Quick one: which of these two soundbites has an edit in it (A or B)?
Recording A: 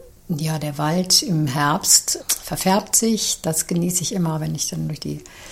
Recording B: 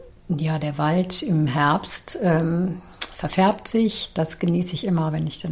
A